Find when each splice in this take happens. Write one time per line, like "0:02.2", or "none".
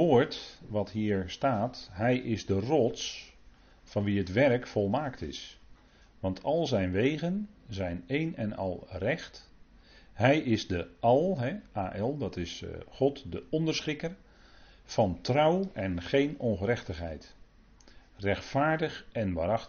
none